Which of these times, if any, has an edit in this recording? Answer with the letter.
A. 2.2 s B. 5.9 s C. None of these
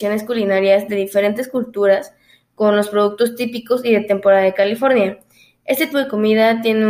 B